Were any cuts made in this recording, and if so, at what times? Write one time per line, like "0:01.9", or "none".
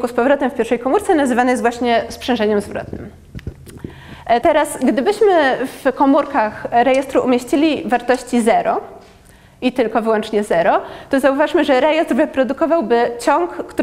0:04.4